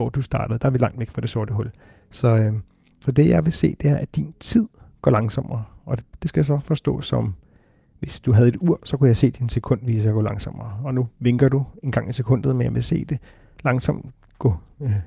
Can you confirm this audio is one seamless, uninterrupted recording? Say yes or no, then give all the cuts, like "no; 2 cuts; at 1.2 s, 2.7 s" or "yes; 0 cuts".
yes; 0 cuts